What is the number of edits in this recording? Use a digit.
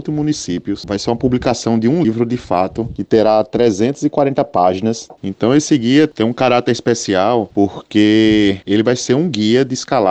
2